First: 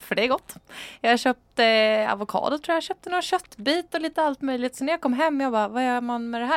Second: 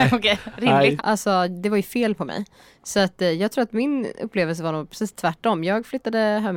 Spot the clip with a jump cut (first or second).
second